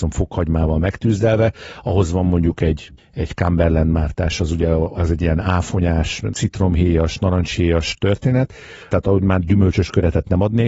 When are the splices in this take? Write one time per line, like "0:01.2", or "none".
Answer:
0:06.3
0:08.9